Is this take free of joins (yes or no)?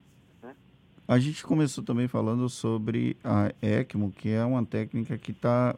no